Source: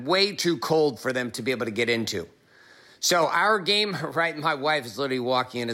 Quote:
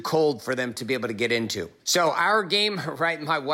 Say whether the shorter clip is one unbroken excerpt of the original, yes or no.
no